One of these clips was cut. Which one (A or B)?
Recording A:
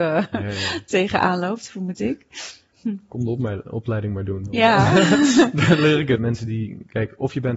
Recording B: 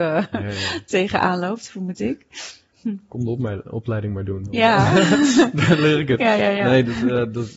A